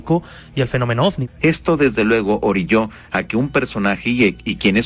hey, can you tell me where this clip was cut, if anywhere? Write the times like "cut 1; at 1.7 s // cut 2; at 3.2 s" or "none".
cut 1; at 1.4 s